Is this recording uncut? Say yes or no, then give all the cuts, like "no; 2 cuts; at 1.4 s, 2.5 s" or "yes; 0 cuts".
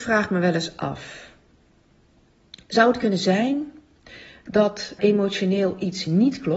no; 1 cut; at 5.0 s